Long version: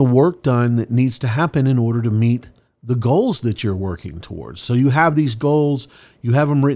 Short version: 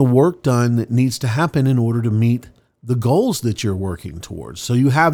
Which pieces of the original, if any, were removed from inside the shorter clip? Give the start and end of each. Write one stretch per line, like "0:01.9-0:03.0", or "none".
none